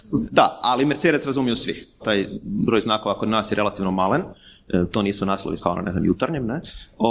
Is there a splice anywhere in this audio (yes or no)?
yes